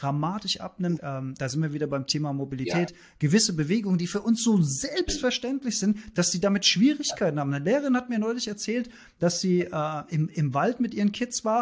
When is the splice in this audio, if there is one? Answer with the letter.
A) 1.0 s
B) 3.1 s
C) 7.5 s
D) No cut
A